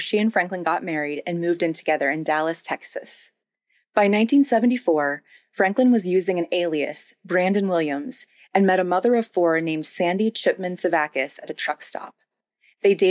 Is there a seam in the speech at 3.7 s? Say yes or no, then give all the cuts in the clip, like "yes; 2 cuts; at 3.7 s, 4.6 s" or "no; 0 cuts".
yes; 1 cut; at 3.7 s